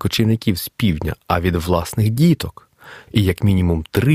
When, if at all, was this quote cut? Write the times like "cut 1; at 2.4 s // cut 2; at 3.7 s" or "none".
cut 1; at 3.1 s